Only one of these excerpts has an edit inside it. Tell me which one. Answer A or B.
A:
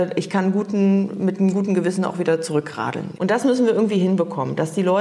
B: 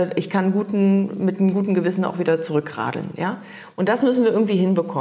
A